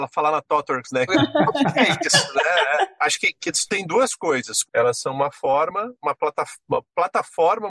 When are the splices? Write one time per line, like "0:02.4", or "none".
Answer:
0:01.1
0:03.0
0:04.7